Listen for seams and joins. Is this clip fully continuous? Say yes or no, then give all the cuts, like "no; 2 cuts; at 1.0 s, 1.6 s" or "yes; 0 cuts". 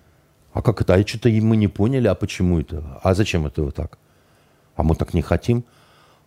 yes; 0 cuts